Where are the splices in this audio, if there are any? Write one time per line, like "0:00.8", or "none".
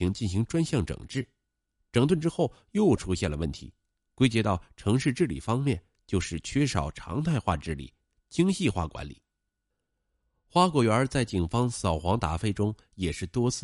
none